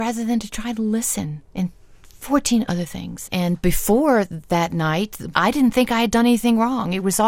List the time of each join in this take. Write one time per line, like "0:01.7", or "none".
0:01.4
0:03.3
0:05.3